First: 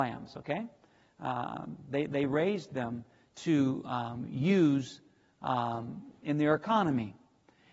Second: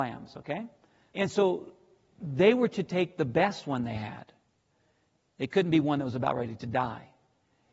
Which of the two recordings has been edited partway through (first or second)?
second